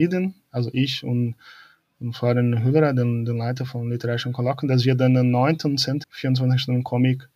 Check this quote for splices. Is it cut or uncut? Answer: cut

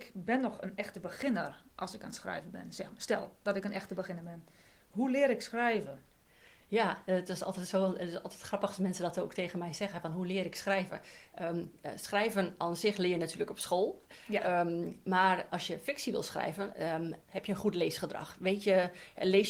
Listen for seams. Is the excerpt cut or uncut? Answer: cut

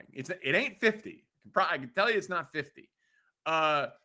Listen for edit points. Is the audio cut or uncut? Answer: uncut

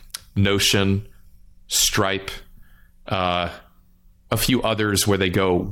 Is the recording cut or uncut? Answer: uncut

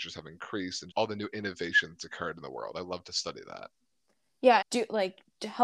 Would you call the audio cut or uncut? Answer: cut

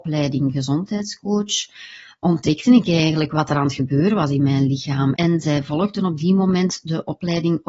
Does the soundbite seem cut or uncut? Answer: cut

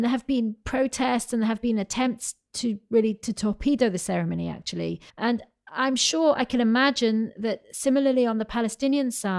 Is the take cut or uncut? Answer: cut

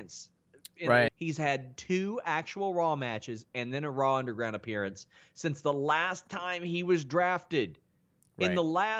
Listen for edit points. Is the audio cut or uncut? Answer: cut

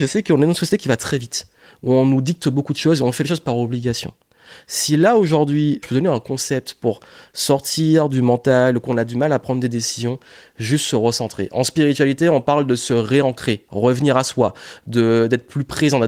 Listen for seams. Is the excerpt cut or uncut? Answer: cut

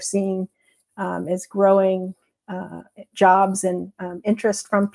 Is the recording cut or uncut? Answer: uncut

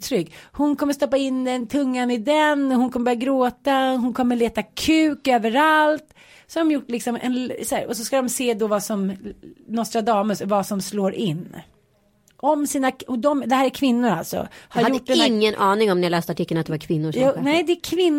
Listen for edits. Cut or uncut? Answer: uncut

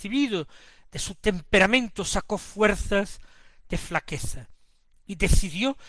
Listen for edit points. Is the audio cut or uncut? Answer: uncut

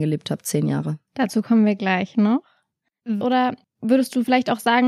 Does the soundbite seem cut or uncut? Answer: cut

